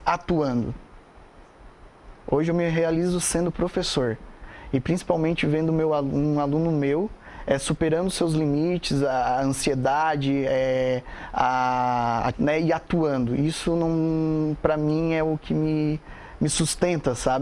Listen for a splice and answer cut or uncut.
cut